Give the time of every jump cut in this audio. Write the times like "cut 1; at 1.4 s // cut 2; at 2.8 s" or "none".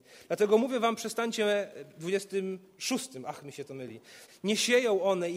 cut 1; at 4.3 s